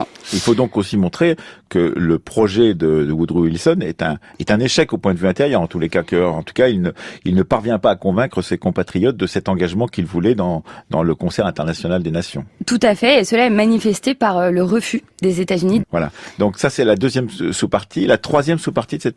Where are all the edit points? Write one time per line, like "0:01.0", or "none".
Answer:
0:15.8